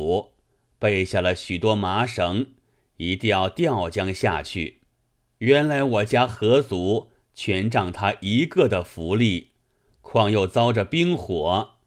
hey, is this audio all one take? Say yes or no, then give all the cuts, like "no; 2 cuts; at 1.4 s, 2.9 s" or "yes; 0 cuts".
no; 2 cuts; at 5.3 s, 9.9 s